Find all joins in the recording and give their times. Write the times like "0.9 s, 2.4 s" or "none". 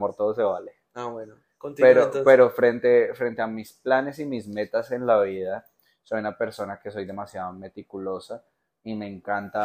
none